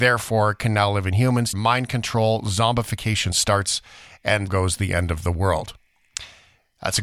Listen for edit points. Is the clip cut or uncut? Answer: cut